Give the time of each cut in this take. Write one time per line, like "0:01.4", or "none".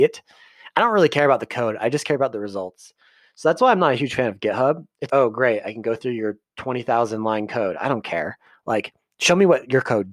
0:05.1